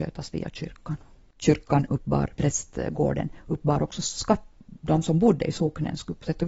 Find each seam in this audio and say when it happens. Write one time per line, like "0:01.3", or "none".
0:02.4

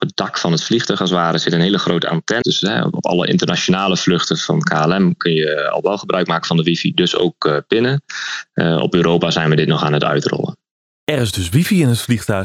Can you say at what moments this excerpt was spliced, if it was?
0:02.4

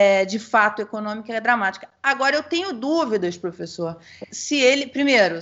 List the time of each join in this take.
0:04.3

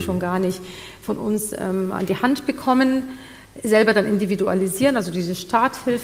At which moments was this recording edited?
none

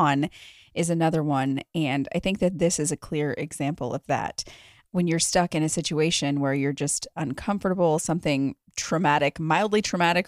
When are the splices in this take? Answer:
none

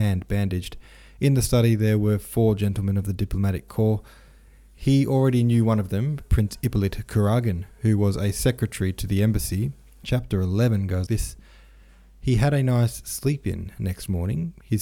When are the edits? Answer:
0:10.0
0:11.1

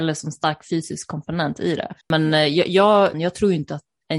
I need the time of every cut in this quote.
0:02.0
0:03.1

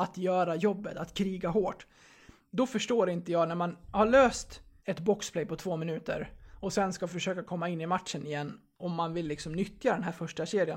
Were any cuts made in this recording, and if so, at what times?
0:04.8

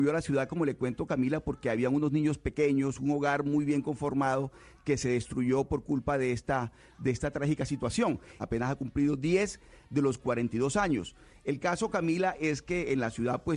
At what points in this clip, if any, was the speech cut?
0:08.4

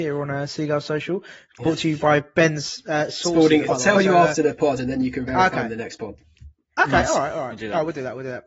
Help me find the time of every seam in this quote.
0:03.7

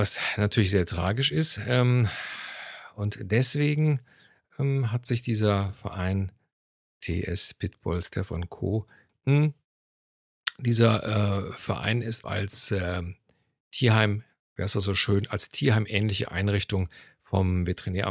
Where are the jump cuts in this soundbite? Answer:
0:09.1
0:12.2

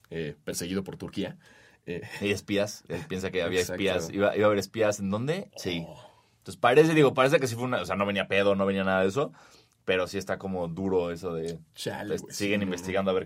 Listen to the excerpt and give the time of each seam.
0:05.5

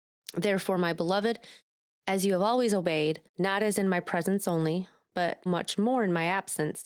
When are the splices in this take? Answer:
0:03.3
0:05.5

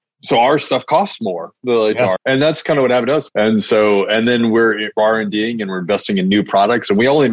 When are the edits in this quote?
0:02.2
0:03.3

